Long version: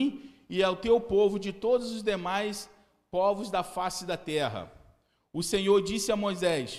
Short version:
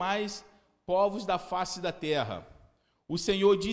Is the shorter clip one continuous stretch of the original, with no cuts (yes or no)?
yes